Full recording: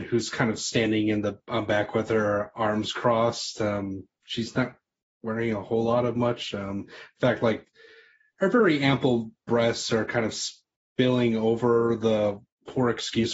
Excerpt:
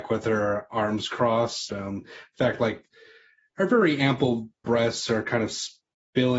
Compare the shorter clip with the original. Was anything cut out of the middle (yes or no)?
yes